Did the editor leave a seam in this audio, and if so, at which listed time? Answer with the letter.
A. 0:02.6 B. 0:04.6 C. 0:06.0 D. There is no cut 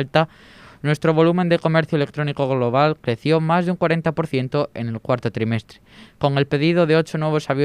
D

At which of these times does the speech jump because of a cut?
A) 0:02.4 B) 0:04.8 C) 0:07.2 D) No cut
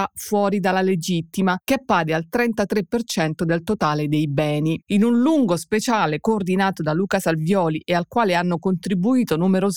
B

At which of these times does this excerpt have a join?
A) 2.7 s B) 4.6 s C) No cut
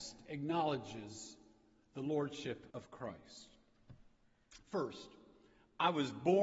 A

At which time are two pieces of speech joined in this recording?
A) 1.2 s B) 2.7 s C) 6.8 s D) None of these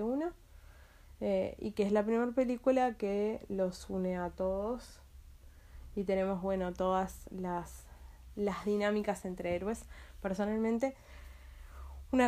D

